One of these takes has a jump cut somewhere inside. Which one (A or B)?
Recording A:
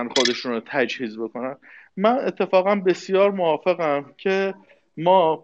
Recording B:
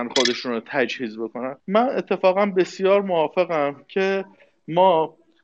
B